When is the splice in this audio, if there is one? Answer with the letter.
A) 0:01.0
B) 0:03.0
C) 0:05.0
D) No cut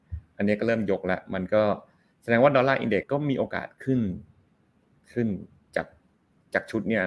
B